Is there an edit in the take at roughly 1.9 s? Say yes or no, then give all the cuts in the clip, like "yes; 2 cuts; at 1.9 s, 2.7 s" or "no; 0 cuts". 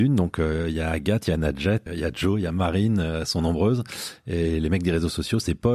yes; 1 cut; at 1.9 s